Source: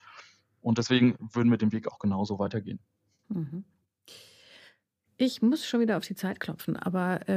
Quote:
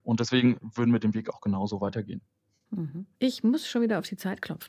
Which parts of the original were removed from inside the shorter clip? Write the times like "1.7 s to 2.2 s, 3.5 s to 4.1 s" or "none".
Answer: 3.7 s to 5.1 s